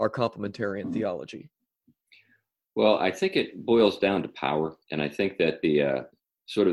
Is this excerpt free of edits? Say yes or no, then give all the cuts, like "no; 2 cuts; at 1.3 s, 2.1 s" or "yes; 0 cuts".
no; 1 cut; at 4.8 s